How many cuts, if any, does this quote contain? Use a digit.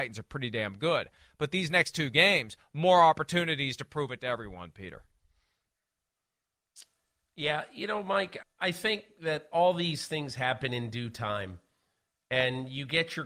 1